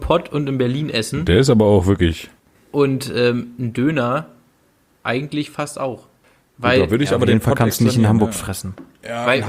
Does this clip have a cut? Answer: no; 0 cuts

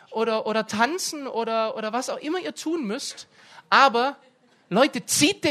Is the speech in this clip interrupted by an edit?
no; 0 cuts

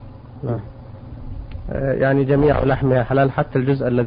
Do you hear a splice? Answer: no; 0 cuts

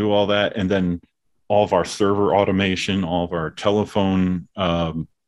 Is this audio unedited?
yes; 0 cuts

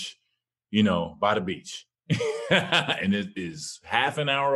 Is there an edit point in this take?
no; 0 cuts

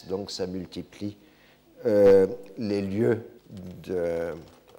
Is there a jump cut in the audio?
yes; 1 cut; at 3.4 s

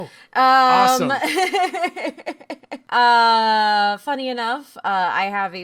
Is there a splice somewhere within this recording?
no; 0 cuts

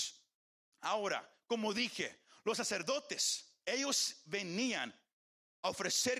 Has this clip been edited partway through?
yes; 1 cut; at 3.6 s

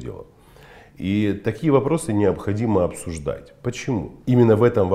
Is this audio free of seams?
yes; 0 cuts

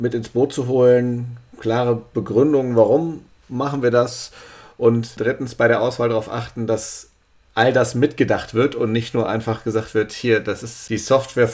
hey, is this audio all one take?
yes; 0 cuts

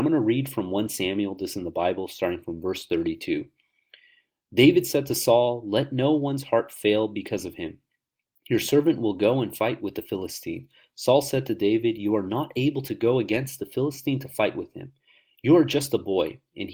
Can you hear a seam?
no; 0 cuts

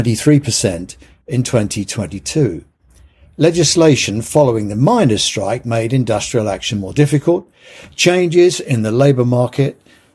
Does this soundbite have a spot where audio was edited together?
no; 0 cuts

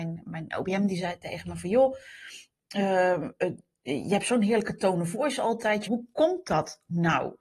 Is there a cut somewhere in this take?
yes; 1 cut; at 5.9 s

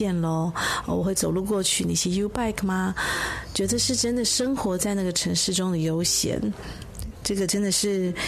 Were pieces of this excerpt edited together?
no; 0 cuts

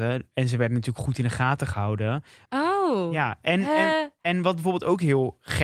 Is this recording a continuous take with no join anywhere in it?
no; 1 cut; at 2.5 s

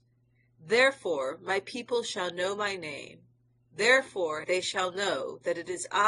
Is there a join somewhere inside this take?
yes; 1 cut; at 4.4 s

